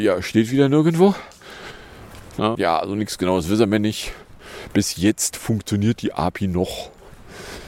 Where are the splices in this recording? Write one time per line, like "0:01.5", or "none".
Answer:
0:02.5